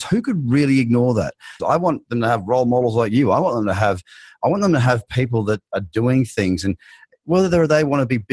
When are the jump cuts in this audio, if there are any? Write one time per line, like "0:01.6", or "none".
0:01.6